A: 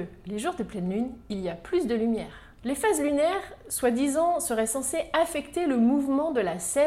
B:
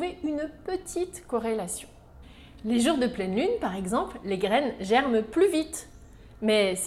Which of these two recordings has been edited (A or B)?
A